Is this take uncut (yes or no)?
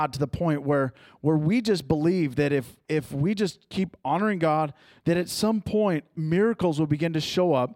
no